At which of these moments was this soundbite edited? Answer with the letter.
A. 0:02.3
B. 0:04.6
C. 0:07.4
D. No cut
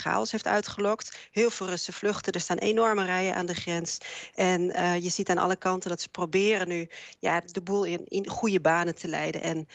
D